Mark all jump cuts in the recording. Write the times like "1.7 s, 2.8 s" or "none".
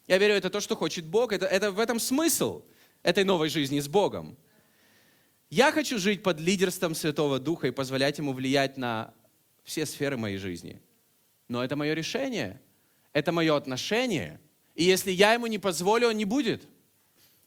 none